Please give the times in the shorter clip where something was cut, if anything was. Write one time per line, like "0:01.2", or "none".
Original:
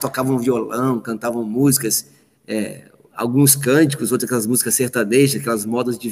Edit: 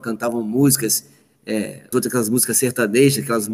0:01.9